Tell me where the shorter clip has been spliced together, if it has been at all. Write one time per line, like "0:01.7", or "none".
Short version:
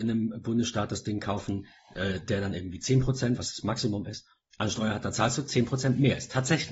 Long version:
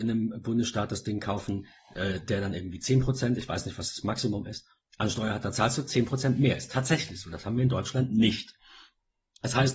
0:03.4